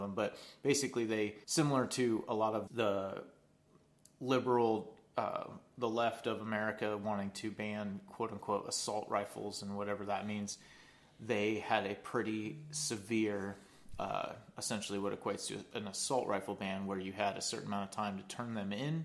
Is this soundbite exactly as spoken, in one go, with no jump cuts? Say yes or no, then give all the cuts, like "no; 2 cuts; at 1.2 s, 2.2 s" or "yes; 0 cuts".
no; 2 cuts; at 1.4 s, 2.7 s